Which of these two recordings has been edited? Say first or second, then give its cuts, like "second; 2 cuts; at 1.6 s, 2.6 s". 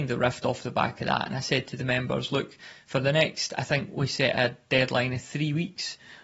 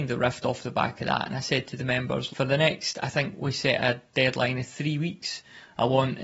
second; 1 cut; at 2.3 s